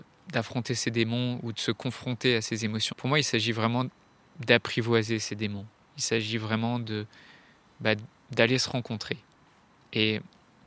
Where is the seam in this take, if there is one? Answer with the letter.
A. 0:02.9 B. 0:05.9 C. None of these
A